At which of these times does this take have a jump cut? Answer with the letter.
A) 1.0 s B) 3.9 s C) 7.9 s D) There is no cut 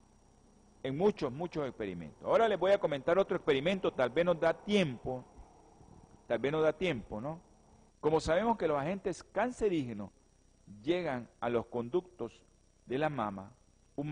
C